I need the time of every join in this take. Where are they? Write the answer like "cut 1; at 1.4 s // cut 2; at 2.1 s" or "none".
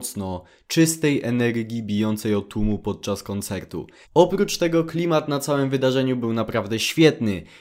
cut 1; at 4.0 s